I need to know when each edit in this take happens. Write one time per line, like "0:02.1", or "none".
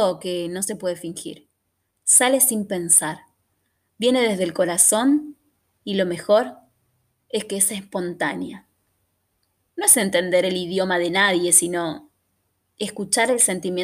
0:09.7